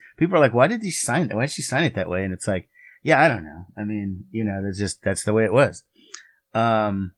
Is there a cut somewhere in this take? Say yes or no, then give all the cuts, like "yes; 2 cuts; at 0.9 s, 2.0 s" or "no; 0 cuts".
no; 0 cuts